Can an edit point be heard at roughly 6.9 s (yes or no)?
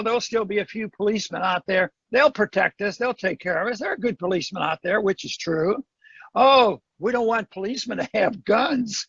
yes